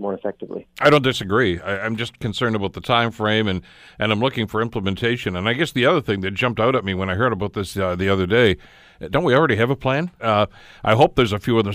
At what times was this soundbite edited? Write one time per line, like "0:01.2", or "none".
0:10.2